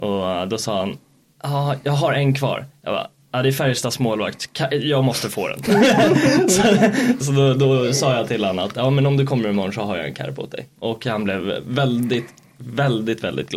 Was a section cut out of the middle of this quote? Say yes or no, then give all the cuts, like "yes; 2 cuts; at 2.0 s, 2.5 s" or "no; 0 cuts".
yes; 1 cut; at 7.2 s